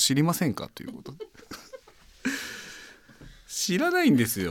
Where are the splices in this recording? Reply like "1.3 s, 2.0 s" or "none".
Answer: 1.8 s